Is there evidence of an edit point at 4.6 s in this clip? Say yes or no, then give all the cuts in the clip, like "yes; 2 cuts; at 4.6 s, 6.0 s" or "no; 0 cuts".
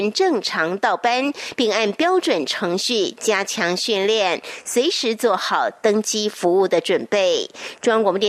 no; 0 cuts